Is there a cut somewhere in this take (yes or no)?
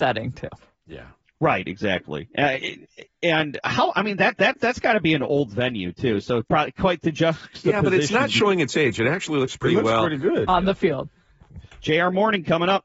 yes